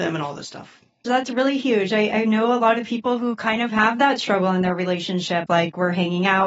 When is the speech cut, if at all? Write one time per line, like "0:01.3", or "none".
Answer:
0:01.0
0:05.5